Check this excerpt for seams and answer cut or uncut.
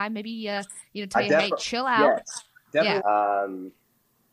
cut